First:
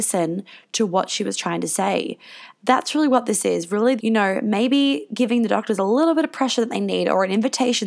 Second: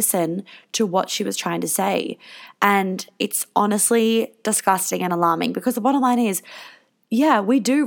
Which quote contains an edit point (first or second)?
first